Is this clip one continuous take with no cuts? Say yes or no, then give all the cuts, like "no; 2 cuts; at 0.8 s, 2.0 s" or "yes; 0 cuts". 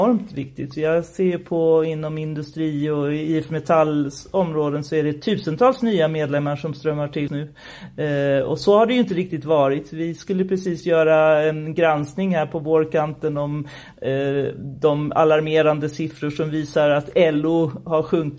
no; 1 cut; at 7.3 s